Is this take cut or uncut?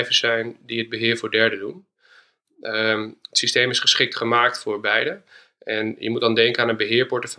uncut